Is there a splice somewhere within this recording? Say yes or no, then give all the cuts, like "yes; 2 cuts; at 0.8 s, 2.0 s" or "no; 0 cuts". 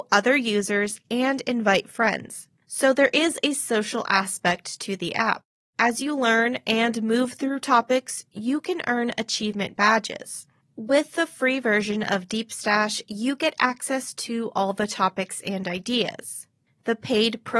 no; 0 cuts